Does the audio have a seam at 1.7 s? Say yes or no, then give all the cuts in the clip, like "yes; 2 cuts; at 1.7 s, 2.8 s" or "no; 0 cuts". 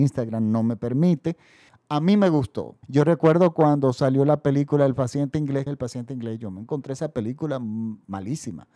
yes; 3 cuts; at 1.7 s, 2.8 s, 5.7 s